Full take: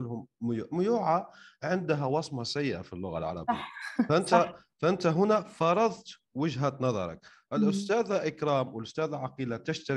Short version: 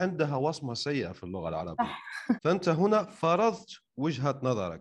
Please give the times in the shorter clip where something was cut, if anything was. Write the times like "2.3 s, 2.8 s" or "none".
2.4 s